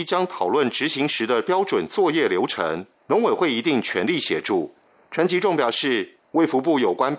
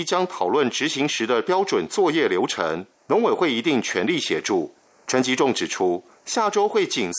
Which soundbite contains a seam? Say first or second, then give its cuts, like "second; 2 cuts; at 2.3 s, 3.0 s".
first; 2 cuts; at 5.1 s, 6.2 s